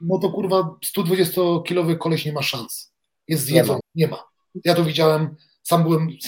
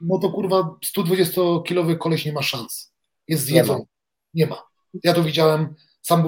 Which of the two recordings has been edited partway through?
first; 1 cut; at 3.8 s

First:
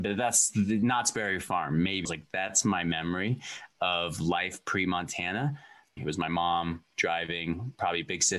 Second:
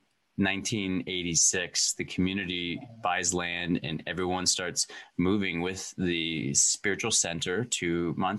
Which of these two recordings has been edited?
first; 2 cuts; at 2.0 s, 6.0 s

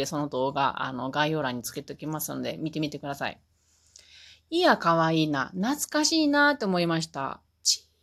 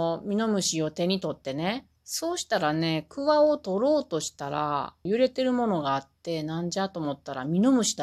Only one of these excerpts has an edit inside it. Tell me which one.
second; 2 cuts; at 2.0 s, 5.1 s

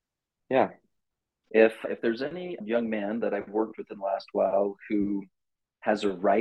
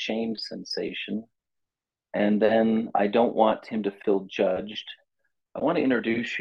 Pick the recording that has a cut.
first; 1 cut; at 1.5 s

